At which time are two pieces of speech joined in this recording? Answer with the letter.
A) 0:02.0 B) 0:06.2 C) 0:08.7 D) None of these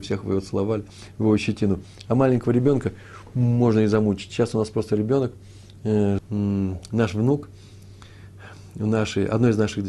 B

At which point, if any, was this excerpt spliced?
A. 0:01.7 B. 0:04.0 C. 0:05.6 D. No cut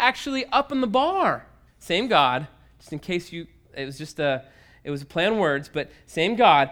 A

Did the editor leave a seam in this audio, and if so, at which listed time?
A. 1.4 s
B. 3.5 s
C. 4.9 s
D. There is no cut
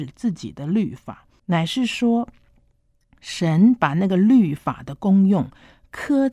A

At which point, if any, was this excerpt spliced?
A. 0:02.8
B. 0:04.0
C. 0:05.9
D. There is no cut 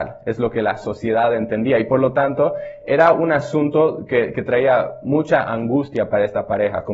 D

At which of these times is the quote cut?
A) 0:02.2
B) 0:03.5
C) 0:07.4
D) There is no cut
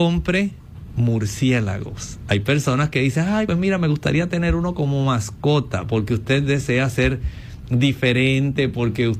B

